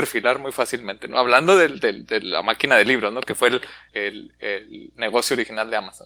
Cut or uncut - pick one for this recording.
cut